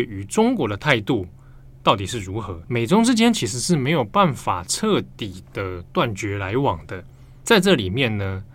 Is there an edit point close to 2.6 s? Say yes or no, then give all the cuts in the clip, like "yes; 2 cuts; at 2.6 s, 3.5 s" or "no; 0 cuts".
yes; 1 cut; at 2.6 s